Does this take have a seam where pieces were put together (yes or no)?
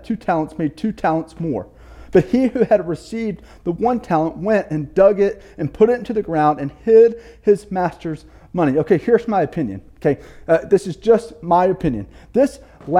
no